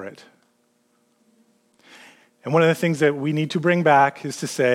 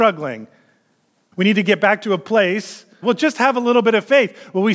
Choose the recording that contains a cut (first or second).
second